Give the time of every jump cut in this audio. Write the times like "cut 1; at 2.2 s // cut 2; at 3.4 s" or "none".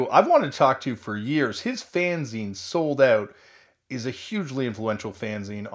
none